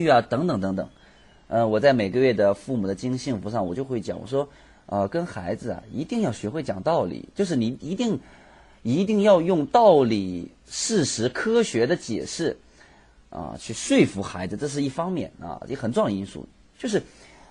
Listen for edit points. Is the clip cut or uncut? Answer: uncut